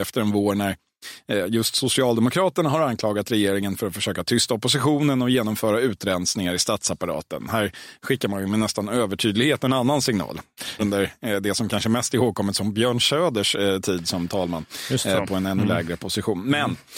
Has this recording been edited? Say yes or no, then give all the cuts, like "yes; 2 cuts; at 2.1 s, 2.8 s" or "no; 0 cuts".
yes; 1 cut; at 10.8 s